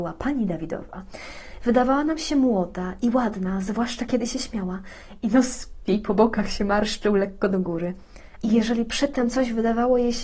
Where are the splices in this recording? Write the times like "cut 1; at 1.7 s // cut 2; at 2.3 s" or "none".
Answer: cut 1; at 8.4 s